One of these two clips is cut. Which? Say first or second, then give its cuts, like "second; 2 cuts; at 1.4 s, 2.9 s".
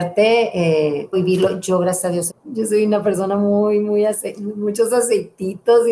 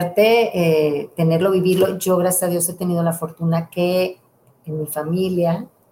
first; 2 cuts; at 1.1 s, 2.3 s